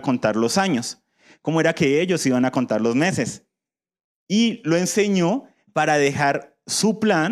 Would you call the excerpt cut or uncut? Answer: uncut